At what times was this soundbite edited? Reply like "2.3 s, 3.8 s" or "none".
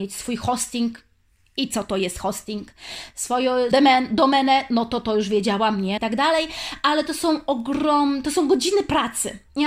3.7 s, 6.0 s